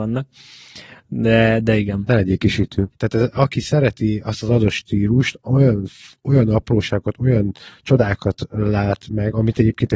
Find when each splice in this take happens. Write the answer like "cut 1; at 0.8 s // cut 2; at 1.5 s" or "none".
cut 1; at 2.9 s